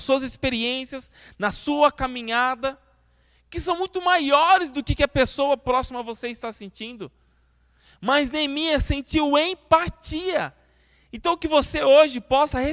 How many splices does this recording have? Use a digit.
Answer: 0